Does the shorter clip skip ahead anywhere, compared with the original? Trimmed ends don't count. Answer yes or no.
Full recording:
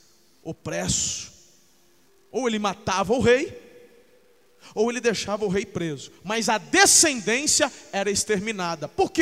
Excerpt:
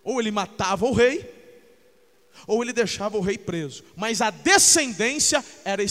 no